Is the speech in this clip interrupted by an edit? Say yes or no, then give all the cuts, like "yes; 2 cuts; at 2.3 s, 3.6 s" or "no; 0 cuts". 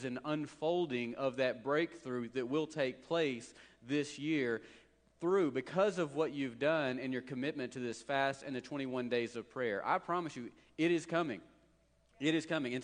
no; 0 cuts